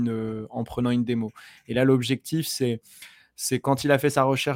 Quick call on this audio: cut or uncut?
uncut